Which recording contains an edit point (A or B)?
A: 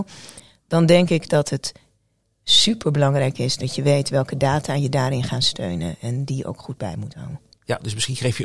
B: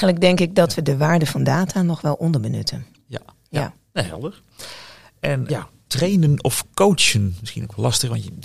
B